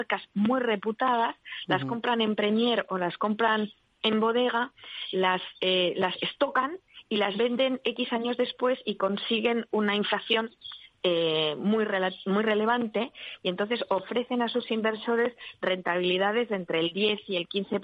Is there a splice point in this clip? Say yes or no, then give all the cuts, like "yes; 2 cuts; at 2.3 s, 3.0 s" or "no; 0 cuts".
no; 0 cuts